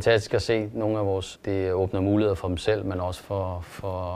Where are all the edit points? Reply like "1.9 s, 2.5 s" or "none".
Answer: 1.3 s